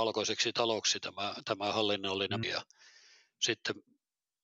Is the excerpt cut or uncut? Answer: cut